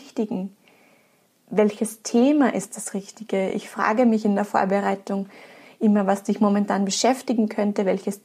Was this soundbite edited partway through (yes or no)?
no